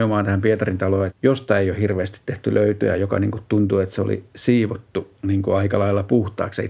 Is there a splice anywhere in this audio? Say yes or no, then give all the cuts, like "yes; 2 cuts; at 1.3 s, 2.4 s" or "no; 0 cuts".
yes; 2 cuts; at 1.1 s, 5.2 s